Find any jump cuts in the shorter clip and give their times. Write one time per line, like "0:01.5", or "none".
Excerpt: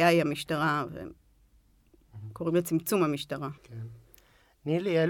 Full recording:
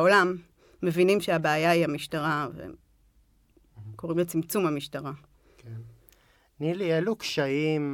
0:03.6